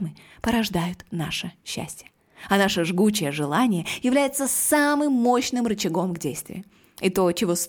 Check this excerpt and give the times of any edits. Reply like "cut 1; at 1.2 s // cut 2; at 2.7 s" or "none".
none